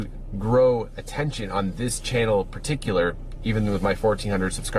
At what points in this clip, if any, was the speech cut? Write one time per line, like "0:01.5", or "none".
none